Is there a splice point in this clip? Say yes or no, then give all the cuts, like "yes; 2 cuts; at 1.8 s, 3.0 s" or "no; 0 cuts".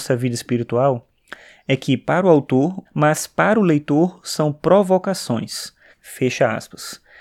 yes; 2 cuts; at 2.9 s, 5.9 s